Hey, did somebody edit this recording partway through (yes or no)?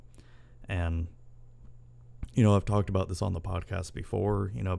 no